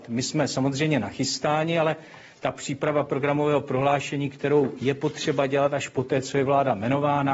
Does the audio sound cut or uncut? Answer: uncut